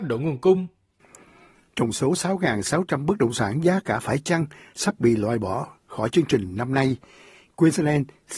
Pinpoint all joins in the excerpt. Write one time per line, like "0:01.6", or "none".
none